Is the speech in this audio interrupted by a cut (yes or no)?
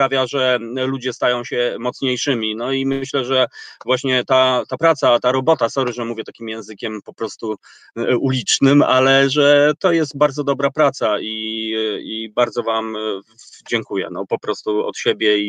no